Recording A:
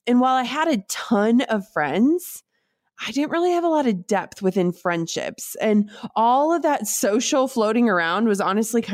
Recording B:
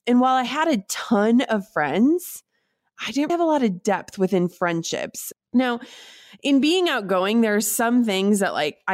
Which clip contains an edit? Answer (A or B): B